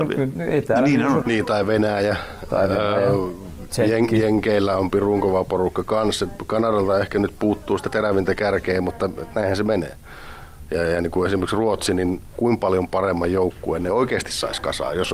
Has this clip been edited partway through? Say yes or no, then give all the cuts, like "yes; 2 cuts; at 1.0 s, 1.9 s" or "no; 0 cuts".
yes; 1 cut; at 1.2 s